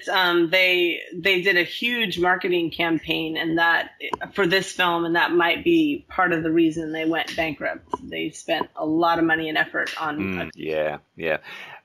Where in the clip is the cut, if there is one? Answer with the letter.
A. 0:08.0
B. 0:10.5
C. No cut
B